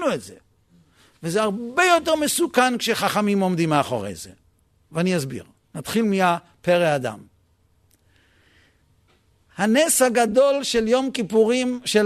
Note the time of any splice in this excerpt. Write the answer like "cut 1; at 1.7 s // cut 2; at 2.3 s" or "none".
none